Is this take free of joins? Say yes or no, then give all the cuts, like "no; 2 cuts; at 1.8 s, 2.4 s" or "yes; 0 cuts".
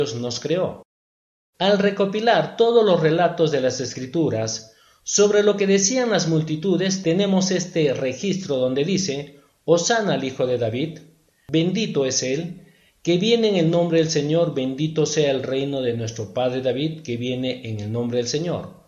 yes; 0 cuts